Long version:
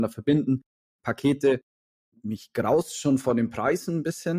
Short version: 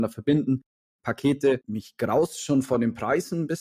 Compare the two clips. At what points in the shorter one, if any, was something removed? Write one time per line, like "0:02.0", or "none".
0:01.6